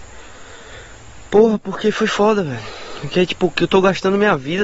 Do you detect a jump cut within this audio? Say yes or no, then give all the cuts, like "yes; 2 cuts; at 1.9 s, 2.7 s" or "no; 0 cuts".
no; 0 cuts